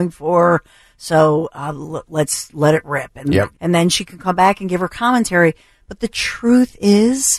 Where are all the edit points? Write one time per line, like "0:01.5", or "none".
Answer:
0:03.5